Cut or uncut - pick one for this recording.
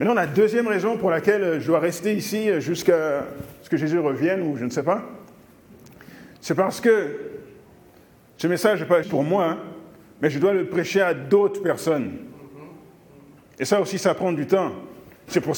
cut